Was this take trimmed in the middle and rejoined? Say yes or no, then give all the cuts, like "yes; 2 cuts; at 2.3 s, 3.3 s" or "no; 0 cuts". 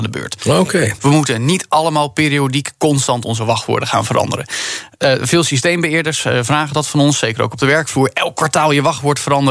yes; 1 cut; at 1.0 s